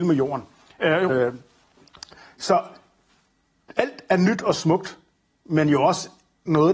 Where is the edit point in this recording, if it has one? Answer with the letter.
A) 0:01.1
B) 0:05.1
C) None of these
A